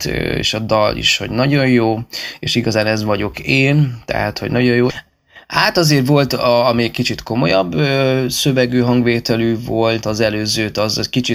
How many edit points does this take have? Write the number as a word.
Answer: two